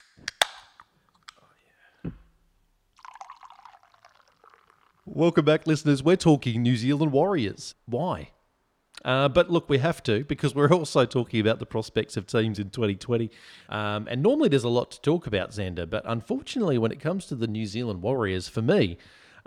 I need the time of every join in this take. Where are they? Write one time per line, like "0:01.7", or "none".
0:07.7
0:13.7